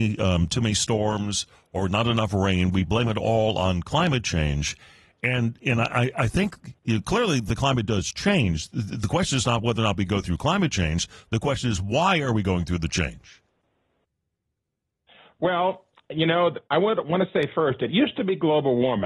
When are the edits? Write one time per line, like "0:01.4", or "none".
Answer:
0:16.7